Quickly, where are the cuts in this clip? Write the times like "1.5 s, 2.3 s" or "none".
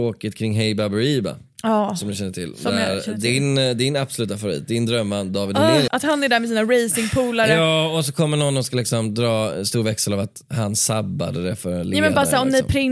5.9 s